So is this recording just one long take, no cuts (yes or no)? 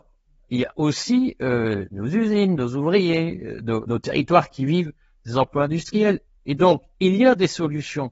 no